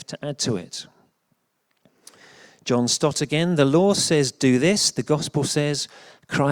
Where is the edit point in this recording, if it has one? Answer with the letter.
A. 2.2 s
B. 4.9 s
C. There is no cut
C